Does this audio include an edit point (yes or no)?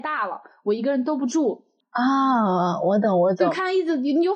yes